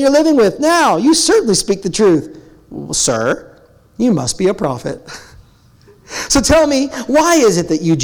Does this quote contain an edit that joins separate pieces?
no; 0 cuts

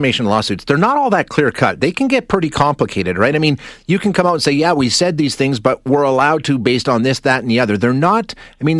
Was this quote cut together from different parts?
no; 0 cuts

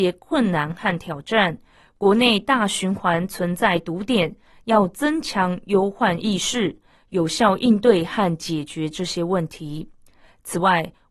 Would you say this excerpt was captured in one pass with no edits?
yes; 0 cuts

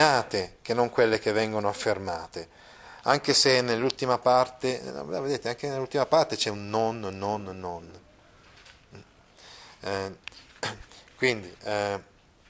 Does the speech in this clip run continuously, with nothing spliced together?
yes; 0 cuts

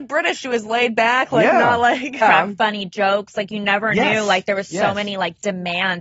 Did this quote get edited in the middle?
yes; 1 cut; at 2.2 s

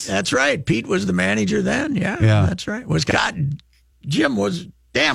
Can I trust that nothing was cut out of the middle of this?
yes; 0 cuts

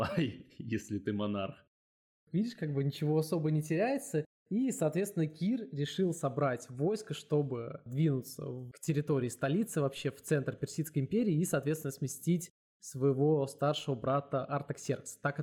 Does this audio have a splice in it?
no; 0 cuts

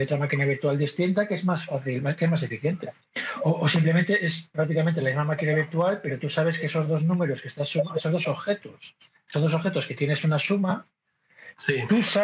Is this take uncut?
yes; 0 cuts

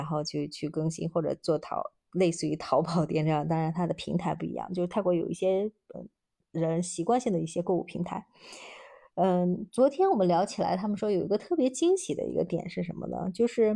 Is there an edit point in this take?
no; 0 cuts

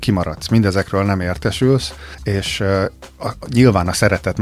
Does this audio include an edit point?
no; 0 cuts

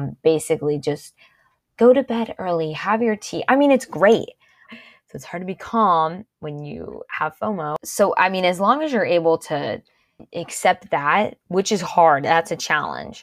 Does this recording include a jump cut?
yes; 1 cut; at 4.7 s

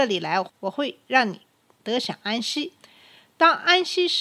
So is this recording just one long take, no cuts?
yes; 0 cuts

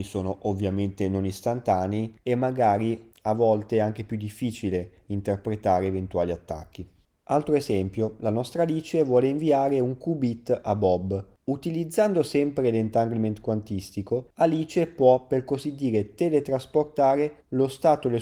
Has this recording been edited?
no; 0 cuts

